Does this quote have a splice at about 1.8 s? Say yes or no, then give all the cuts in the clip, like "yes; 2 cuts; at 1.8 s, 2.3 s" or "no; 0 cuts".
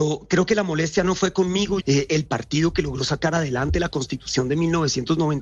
yes; 1 cut; at 1.8 s